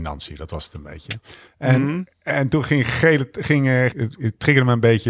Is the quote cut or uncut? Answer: cut